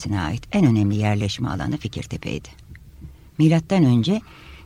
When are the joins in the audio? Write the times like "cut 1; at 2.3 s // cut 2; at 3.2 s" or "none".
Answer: none